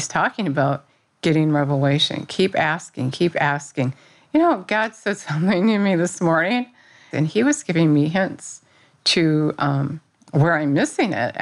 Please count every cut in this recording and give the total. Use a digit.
1